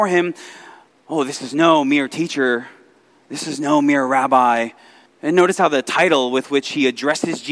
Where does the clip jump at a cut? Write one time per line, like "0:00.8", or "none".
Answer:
0:05.1